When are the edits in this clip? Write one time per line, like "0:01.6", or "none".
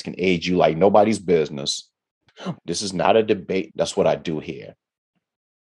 0:02.5
0:03.7